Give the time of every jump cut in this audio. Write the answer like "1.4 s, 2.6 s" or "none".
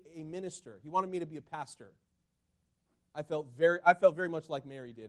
none